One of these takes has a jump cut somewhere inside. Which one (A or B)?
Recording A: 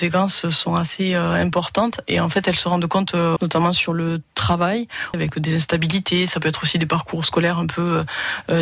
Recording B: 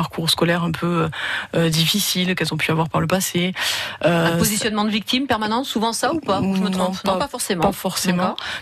A